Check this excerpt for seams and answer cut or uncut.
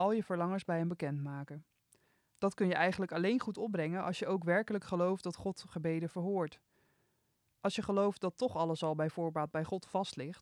uncut